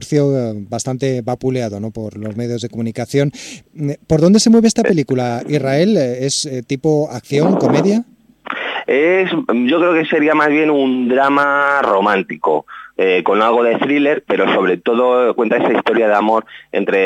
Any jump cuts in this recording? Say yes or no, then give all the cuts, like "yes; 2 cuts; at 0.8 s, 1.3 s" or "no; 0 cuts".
no; 0 cuts